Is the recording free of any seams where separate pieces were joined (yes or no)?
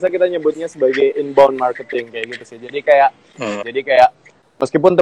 no